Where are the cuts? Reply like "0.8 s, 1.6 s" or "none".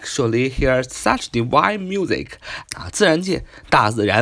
2.6 s